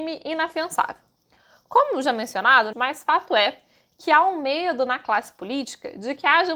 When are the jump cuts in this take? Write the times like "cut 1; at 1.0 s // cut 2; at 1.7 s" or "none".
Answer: cut 1; at 2.7 s

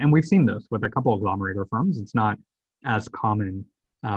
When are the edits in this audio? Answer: none

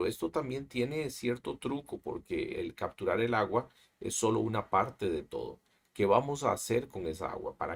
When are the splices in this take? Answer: cut 1; at 2.5 s

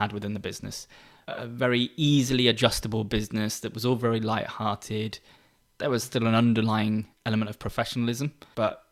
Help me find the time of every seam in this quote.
none

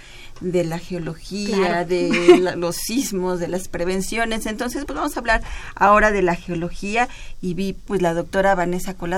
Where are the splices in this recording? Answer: cut 1; at 4.9 s // cut 2; at 7.9 s

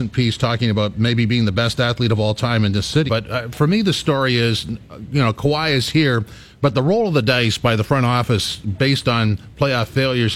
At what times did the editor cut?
cut 1; at 3.1 s

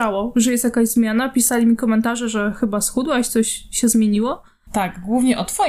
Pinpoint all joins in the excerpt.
cut 1; at 4.7 s

